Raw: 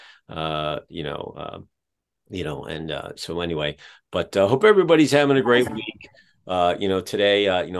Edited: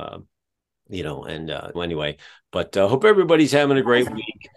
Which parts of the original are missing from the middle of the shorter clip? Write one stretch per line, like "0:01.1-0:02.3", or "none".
0:03.2-0:03.3